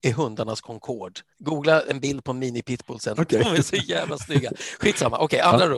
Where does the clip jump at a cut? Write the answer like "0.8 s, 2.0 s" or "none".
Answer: 1.3 s, 3.2 s